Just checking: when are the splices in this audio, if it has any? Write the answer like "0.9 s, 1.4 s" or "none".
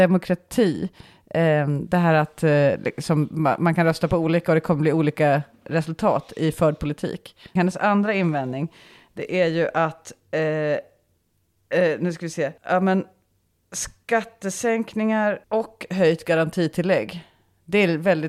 7.6 s, 12.6 s, 15.4 s